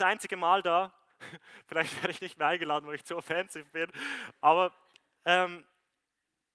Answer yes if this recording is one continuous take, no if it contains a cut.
yes